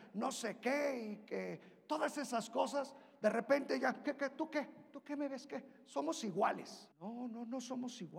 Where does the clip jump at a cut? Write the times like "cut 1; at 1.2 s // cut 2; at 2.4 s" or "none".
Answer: cut 1; at 6.9 s